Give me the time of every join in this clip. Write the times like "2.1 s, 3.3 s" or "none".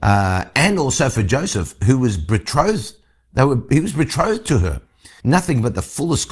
5.2 s